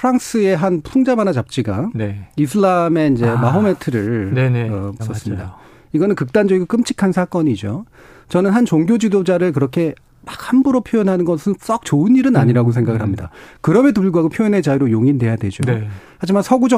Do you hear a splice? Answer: yes; 1 cut; at 5.0 s

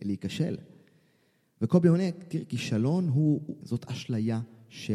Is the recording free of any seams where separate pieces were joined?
no; 1 cut; at 3.6 s

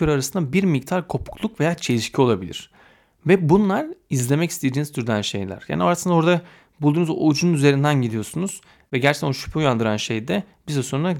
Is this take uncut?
yes; 0 cuts

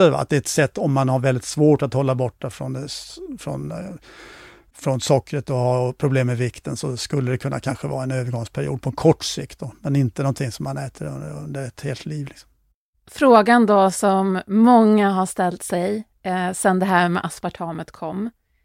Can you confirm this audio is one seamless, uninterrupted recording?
yes; 0 cuts

